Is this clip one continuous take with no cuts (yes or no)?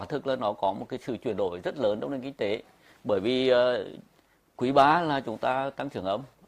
yes